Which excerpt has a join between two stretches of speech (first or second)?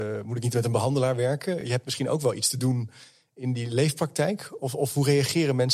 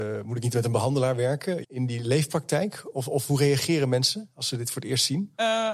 second